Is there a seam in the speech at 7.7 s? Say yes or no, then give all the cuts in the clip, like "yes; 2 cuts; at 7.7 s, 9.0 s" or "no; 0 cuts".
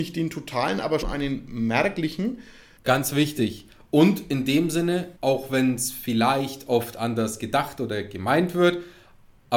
no; 3 cuts; at 1.0 s, 2.8 s, 5.2 s